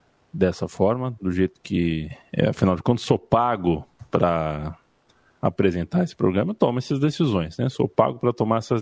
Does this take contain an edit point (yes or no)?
no